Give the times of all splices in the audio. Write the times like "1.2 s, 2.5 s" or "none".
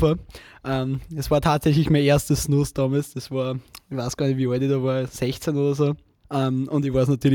6.2 s